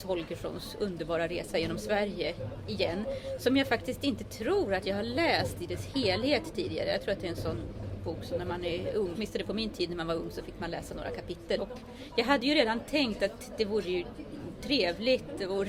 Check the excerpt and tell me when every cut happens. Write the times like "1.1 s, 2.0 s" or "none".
9.1 s, 11.6 s